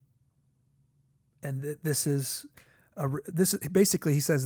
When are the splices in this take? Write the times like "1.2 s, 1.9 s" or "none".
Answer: none